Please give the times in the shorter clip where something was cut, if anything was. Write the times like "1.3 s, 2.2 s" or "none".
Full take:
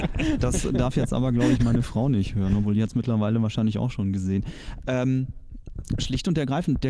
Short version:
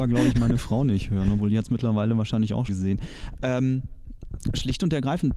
2.7 s